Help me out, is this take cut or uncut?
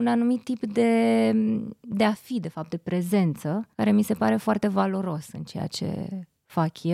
cut